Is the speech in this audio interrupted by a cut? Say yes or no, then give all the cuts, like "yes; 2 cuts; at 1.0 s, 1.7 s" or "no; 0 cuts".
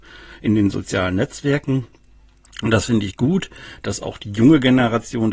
no; 0 cuts